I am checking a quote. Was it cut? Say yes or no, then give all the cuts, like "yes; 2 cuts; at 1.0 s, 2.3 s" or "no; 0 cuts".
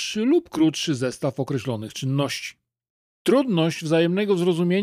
yes; 1 cut; at 3.1 s